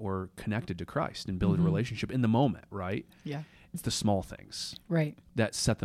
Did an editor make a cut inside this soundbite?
yes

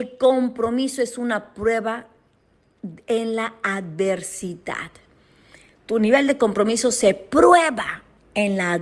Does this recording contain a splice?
no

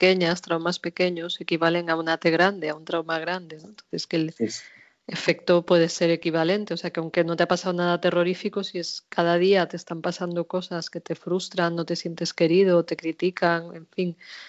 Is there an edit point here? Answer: no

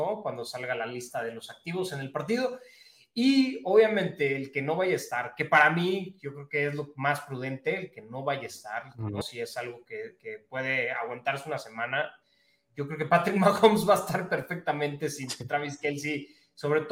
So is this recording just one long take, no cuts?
no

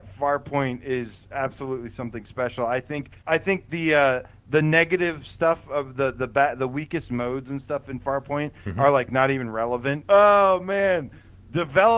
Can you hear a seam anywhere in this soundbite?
yes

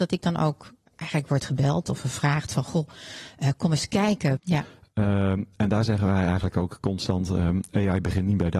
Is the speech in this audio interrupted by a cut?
yes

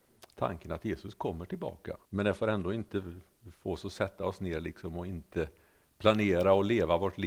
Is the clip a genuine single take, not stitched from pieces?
no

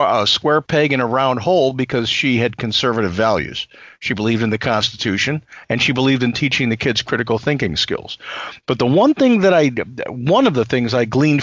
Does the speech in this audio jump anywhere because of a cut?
no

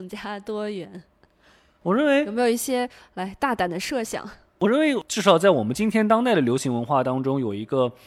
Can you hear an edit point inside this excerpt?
no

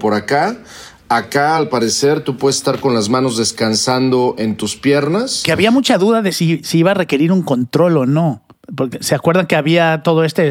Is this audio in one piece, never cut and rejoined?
yes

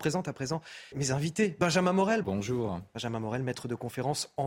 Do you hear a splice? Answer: yes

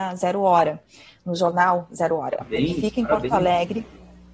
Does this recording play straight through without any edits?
yes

